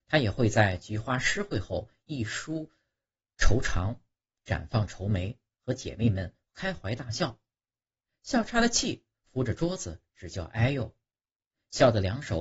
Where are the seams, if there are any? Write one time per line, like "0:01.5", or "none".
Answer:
none

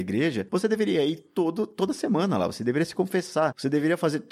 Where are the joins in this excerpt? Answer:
none

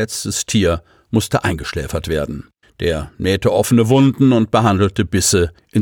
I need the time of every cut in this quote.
0:02.6

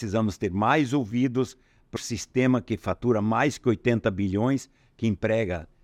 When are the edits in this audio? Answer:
0:02.0

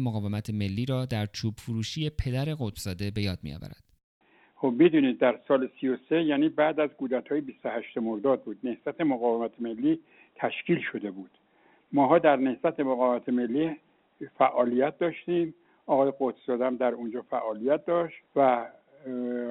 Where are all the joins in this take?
0:18.3

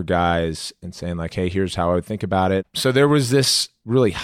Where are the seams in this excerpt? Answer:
0:02.6

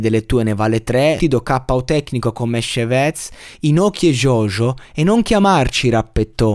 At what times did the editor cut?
0:01.2

